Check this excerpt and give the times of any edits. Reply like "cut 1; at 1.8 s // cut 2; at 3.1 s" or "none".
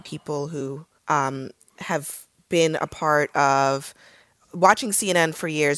cut 1; at 1.0 s